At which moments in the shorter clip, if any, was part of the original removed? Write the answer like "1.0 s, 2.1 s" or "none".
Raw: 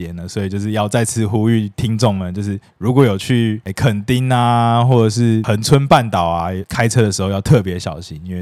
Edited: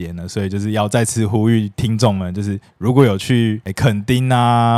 none